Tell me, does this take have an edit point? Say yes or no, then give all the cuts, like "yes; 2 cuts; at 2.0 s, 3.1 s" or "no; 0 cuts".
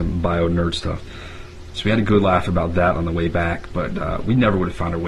yes; 1 cut; at 1.7 s